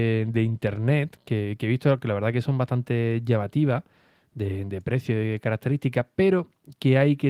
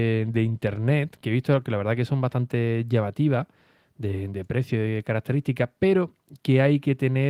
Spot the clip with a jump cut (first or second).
second